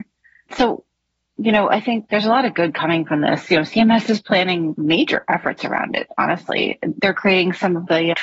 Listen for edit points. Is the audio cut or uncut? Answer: uncut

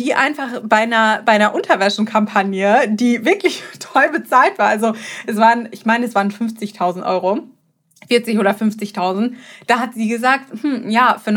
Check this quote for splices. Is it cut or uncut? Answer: uncut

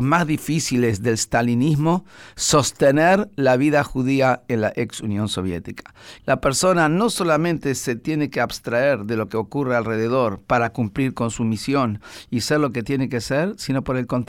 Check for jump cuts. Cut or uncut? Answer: cut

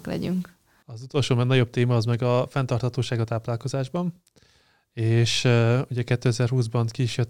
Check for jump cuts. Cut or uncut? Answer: uncut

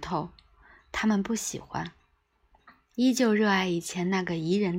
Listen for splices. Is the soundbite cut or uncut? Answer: uncut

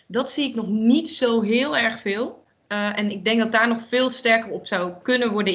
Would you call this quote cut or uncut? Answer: uncut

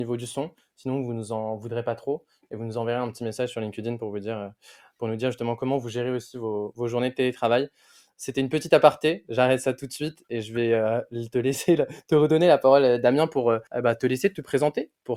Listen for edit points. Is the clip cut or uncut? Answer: uncut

